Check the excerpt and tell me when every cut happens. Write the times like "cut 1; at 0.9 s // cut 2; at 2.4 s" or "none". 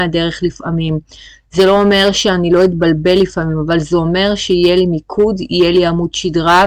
none

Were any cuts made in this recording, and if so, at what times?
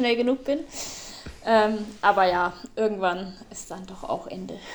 none

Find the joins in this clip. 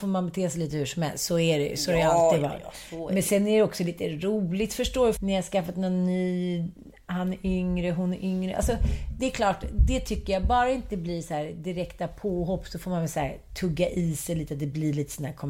cut 1; at 5.2 s

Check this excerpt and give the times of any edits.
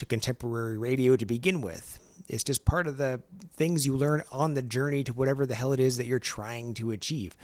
none

